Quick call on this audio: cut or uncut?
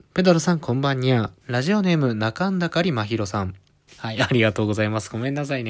cut